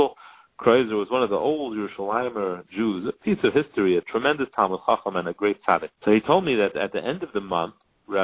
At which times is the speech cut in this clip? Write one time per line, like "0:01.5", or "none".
0:05.9